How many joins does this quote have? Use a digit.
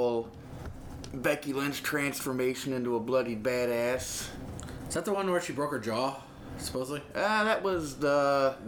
0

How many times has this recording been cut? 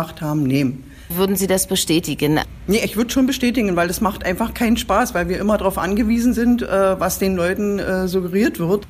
1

